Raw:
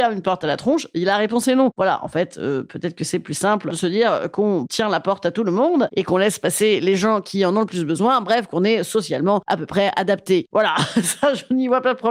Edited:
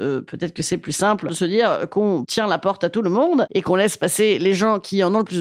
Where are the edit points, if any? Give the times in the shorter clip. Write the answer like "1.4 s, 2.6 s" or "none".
none